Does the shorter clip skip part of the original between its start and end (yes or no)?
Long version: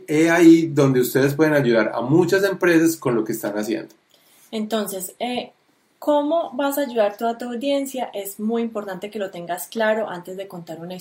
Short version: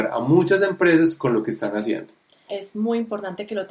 yes